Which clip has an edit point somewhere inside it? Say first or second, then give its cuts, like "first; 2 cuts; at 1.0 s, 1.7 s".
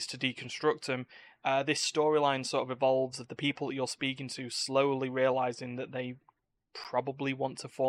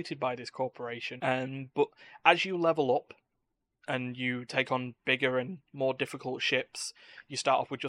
second; 1 cut; at 1.2 s